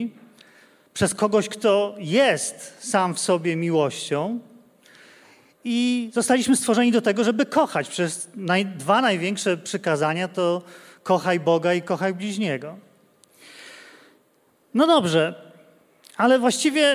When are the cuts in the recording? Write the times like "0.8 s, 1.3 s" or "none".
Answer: none

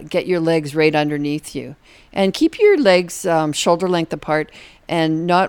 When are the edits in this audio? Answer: none

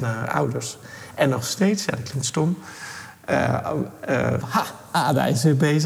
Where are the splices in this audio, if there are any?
4.4 s

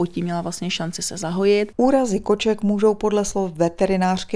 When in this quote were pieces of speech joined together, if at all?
1.7 s

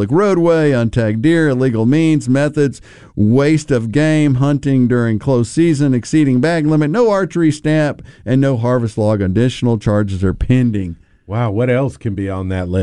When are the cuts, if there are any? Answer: none

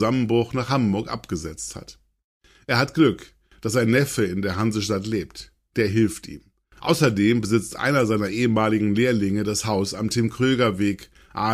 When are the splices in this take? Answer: none

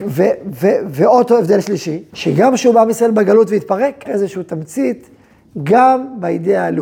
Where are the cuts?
2.1 s, 4.1 s

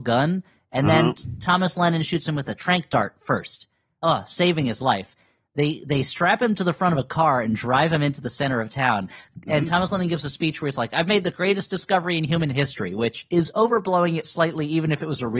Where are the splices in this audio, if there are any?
none

